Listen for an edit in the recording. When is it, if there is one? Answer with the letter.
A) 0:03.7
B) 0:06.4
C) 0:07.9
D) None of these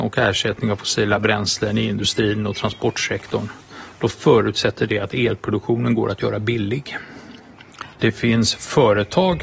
C